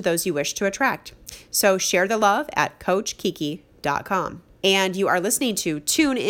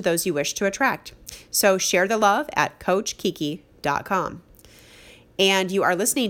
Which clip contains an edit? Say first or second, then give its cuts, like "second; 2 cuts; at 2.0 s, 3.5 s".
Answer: first; 1 cut; at 4.5 s